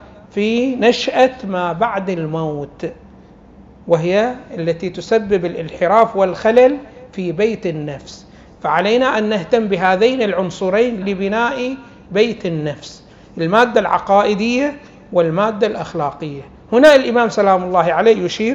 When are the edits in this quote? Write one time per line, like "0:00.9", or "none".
0:11.0